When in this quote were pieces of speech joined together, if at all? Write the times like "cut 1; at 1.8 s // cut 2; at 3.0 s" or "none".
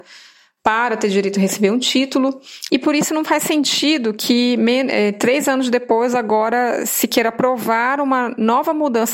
cut 1; at 2.7 s